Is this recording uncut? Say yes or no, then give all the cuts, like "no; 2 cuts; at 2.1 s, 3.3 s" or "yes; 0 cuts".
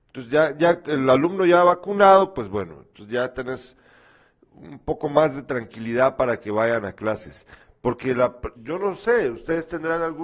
no; 1 cut; at 8.6 s